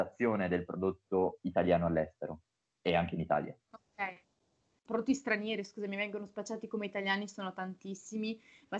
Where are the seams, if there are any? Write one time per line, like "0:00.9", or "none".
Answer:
0:04.9